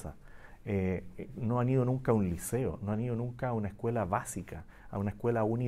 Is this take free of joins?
yes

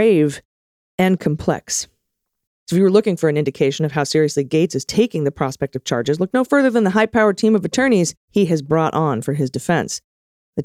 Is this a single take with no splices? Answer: no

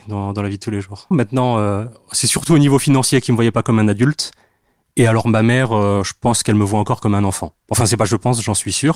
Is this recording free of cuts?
no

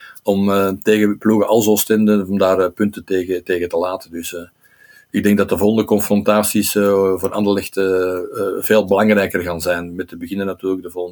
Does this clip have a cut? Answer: no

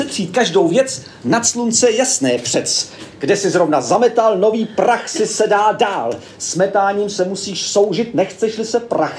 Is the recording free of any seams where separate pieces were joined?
yes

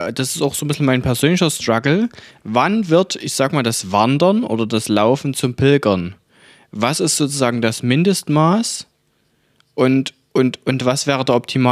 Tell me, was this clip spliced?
no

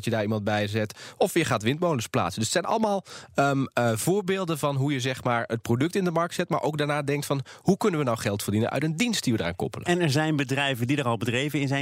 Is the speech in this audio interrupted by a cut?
no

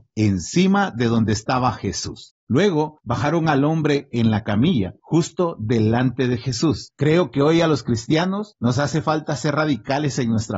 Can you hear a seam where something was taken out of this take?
yes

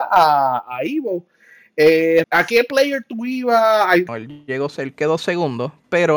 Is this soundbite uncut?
no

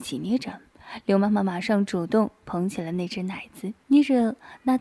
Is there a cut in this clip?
yes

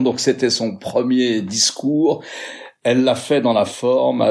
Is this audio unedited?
yes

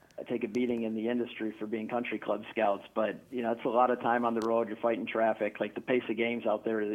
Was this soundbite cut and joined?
no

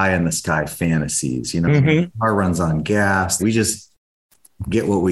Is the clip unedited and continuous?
no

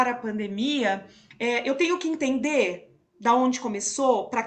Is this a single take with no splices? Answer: yes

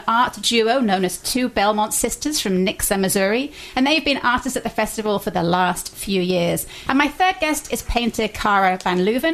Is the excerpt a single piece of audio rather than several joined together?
no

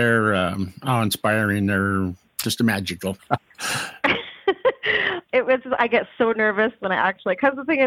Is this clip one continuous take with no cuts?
no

